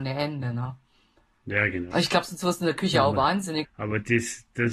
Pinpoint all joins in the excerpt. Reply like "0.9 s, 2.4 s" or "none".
1.9 s, 3.6 s